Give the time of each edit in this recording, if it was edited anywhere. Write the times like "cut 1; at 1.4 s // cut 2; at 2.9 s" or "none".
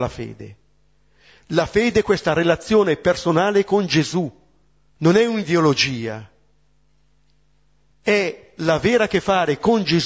cut 1; at 4.9 s

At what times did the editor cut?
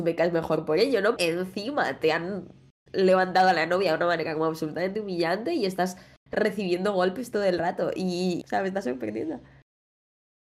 cut 1; at 1.2 s // cut 2; at 8.4 s

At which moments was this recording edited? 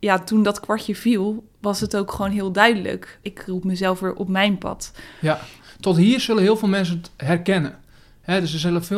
cut 1; at 1.5 s // cut 2; at 3.2 s

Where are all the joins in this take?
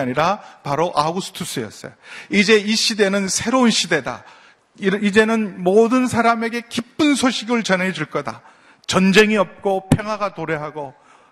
none

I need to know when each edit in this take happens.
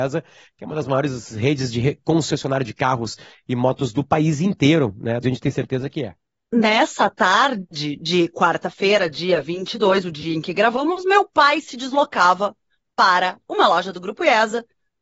cut 1; at 5.2 s

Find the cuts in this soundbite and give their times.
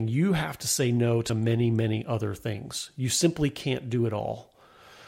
none

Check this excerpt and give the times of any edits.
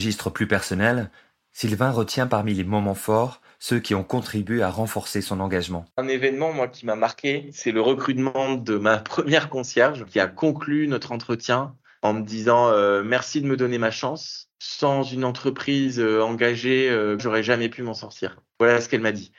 cut 1; at 5.9 s // cut 2; at 17.2 s

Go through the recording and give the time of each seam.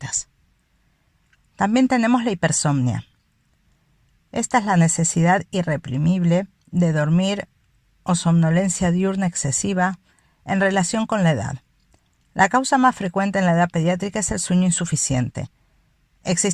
none

